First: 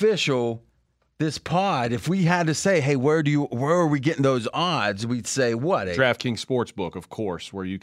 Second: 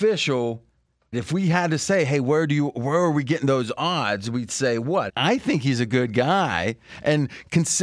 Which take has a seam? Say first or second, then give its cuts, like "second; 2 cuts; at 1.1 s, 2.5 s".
second; 2 cuts; at 1.1 s, 5.1 s